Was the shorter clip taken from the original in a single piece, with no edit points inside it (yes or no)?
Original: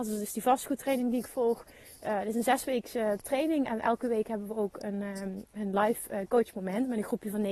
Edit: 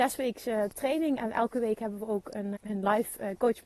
no